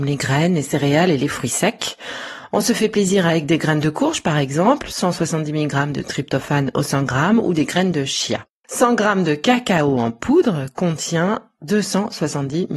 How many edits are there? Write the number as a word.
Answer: one